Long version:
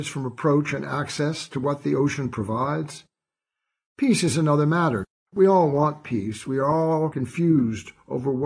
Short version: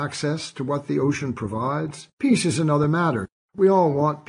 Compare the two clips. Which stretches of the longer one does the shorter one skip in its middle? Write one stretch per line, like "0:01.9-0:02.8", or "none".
0:03.1-0:03.9